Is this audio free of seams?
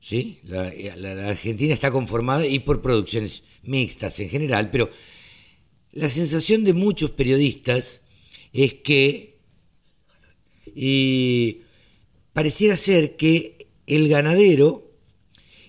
no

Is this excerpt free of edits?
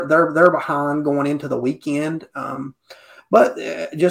yes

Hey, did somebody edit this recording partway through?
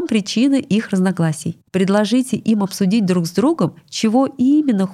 no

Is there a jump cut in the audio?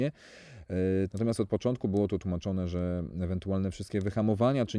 yes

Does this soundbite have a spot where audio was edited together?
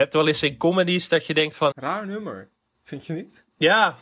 yes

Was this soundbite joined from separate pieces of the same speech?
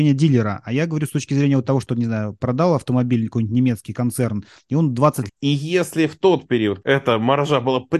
yes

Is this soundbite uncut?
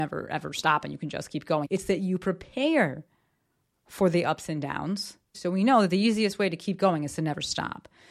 no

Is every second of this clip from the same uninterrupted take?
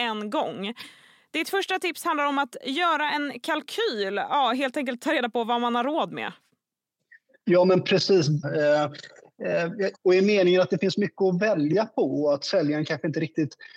no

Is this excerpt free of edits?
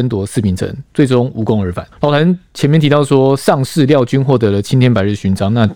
no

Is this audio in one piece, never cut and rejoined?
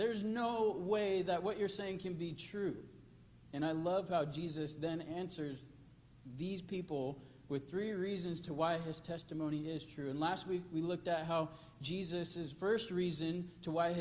yes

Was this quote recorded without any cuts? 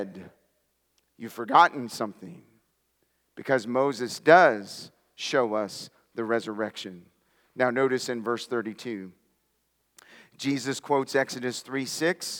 yes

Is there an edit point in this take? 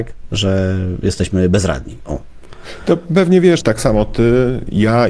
yes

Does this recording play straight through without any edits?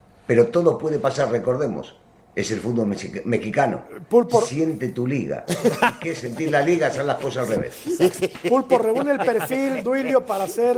yes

